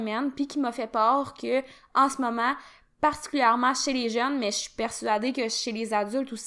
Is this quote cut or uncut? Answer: uncut